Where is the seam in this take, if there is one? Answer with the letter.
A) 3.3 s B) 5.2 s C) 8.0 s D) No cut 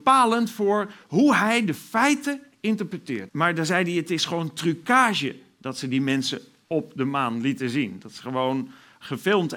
A